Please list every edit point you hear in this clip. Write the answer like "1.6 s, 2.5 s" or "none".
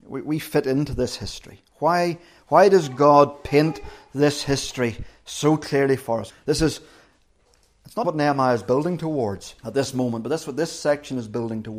6.3 s, 8.0 s, 9.6 s